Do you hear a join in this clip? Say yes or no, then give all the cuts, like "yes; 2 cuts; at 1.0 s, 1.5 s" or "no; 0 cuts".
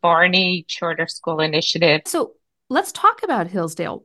yes; 1 cut; at 2.1 s